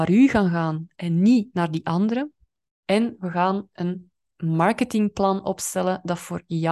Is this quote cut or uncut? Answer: cut